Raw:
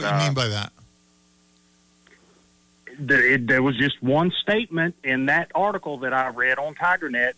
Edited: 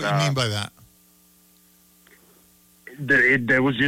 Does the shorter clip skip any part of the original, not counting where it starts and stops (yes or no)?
no